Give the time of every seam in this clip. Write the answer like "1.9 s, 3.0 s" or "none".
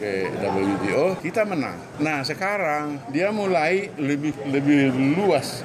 1.2 s